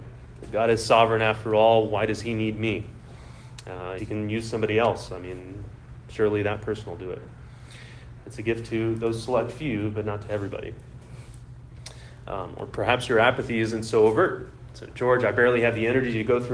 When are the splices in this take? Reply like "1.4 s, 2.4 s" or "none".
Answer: 4.0 s, 8.2 s